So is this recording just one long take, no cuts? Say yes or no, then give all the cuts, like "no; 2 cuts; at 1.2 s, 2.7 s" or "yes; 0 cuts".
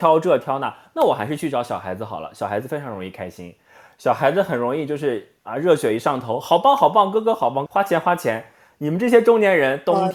no; 1 cut; at 7.7 s